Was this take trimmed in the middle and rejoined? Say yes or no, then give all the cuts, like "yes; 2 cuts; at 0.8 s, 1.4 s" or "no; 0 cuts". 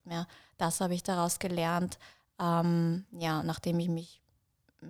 no; 0 cuts